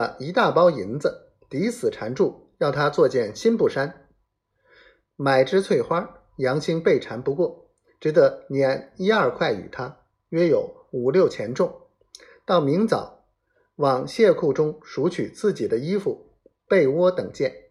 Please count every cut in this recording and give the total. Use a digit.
0